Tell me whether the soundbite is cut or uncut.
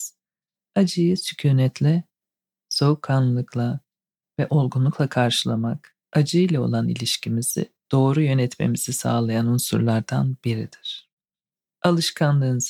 cut